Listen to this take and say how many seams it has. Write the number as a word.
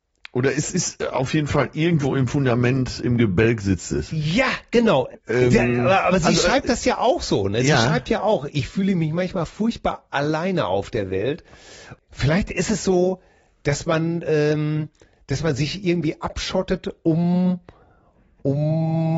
one